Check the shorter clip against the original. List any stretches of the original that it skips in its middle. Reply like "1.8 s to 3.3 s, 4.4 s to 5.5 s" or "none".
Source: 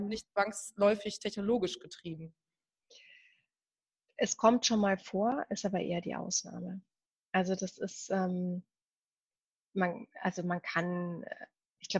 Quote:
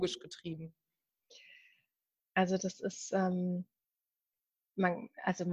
3.8 s to 7.2 s